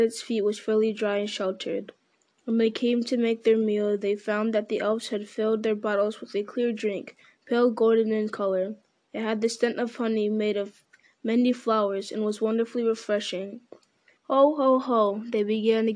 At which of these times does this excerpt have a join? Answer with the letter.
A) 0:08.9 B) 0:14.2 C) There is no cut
B